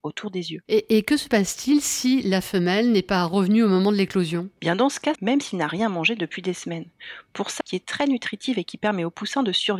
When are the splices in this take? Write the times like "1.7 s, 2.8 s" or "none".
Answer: 5.1 s, 7.6 s